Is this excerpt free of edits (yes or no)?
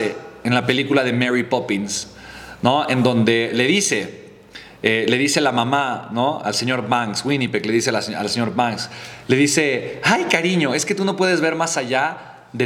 yes